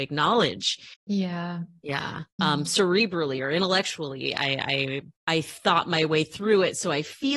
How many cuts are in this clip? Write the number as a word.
three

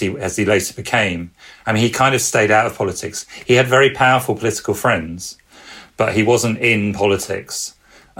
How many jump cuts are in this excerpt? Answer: zero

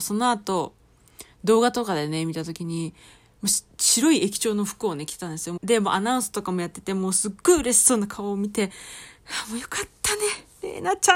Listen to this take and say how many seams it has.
one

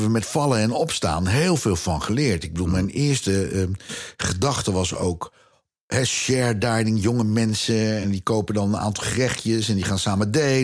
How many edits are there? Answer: one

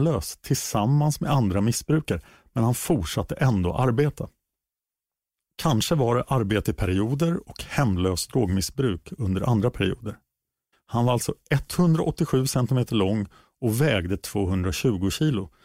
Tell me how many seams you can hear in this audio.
one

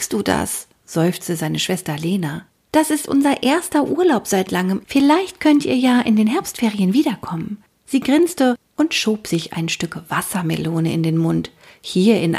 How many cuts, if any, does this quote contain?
one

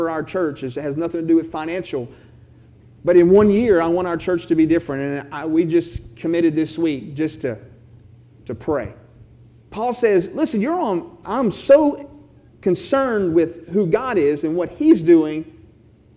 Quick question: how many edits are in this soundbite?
two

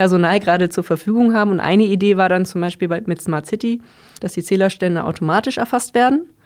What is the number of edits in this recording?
one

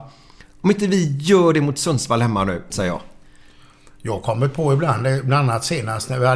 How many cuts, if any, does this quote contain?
one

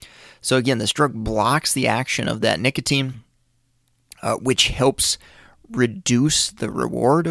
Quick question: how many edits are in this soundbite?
zero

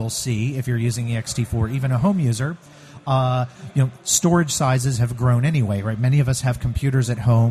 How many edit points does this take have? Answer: zero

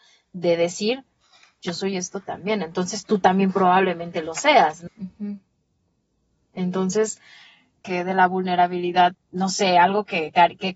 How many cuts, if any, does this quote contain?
three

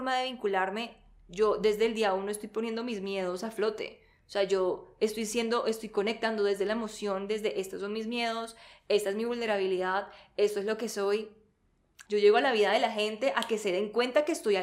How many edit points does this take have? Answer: one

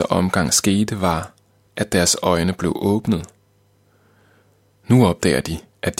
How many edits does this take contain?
zero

